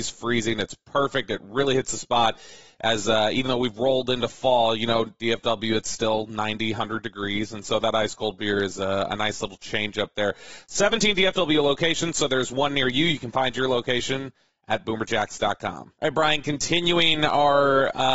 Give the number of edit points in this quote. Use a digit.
0